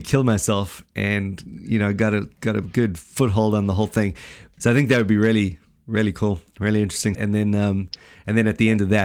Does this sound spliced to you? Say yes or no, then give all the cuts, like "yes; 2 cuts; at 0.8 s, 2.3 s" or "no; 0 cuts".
yes; 2 cuts; at 4.6 s, 7.1 s